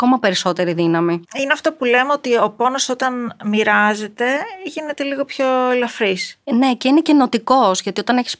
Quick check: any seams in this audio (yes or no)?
yes